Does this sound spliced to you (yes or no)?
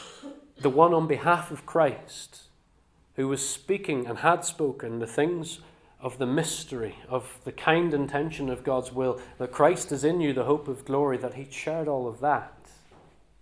no